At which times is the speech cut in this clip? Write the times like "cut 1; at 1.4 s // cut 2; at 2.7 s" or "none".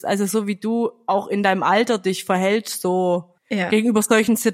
cut 1; at 3.4 s